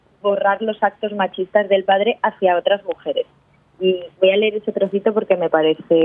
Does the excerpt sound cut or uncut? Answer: uncut